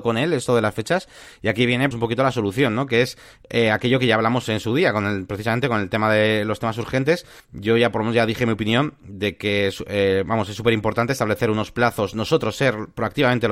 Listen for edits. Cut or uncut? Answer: cut